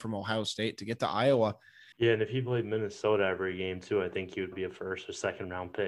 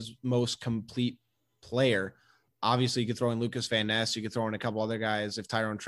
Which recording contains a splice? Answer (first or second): first